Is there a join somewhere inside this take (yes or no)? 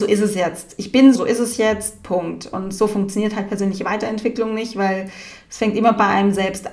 yes